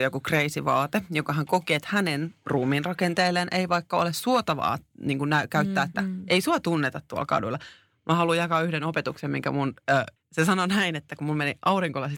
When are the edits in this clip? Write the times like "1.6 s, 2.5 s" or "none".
5.9 s, 10.2 s